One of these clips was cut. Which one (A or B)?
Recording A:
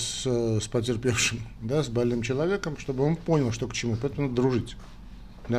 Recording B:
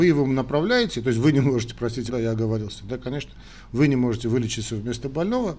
B